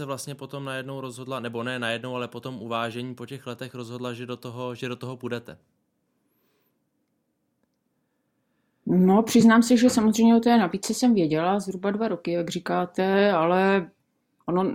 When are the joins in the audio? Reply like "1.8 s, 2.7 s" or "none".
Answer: none

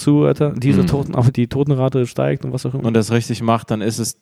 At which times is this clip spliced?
1.3 s, 2.8 s

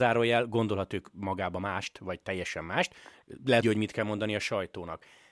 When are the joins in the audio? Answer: 3.6 s

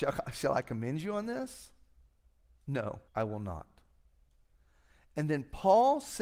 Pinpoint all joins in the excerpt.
3.1 s

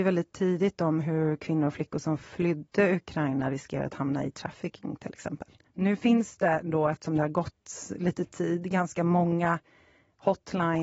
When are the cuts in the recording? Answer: 5.7 s

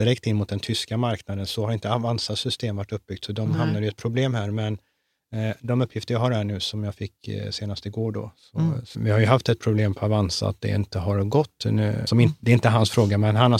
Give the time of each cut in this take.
8.9 s, 12.1 s

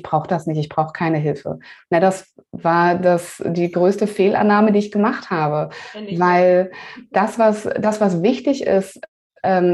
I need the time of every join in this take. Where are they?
7.1 s

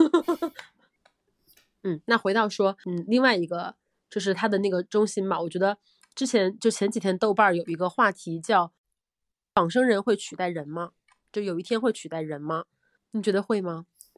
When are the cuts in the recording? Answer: none

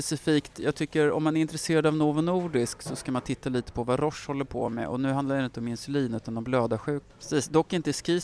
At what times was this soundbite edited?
7.1 s

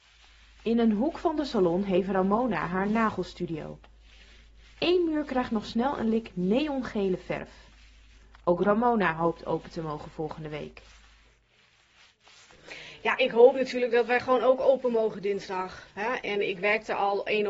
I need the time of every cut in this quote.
none

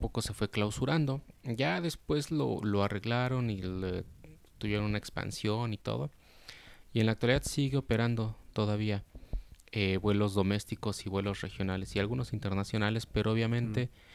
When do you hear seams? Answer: none

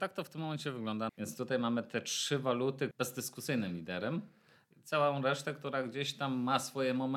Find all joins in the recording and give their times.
1.1 s, 2.9 s

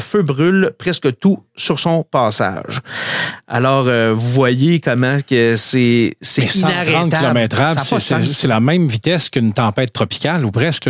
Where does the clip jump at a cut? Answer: none

